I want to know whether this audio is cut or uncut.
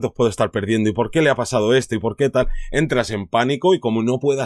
uncut